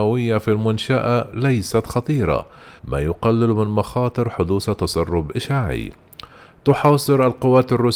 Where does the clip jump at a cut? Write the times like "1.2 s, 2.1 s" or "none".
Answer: 2.8 s